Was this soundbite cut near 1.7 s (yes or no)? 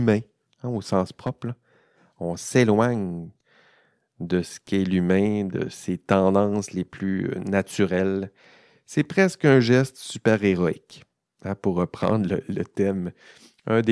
no